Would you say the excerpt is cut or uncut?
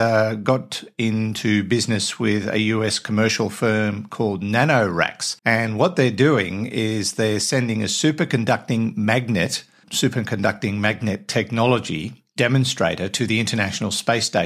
cut